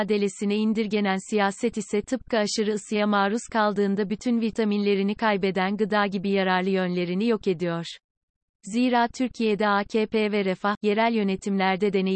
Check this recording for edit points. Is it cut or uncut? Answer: cut